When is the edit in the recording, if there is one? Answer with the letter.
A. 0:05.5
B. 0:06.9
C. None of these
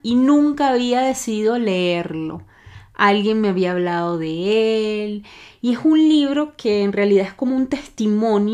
A